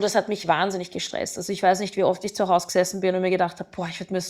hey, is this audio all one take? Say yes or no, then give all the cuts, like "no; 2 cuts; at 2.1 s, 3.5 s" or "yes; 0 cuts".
yes; 0 cuts